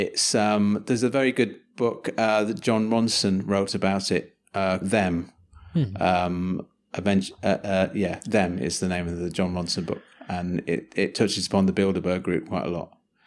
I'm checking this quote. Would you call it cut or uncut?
cut